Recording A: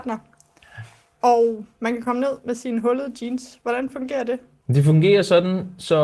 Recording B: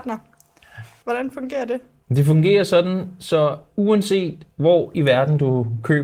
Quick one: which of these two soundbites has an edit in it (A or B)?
B